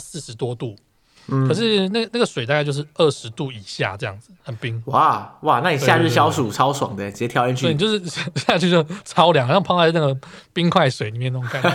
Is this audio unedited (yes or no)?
yes